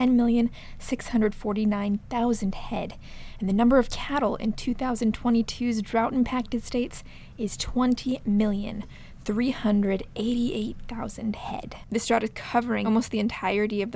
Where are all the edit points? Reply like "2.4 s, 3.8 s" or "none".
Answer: none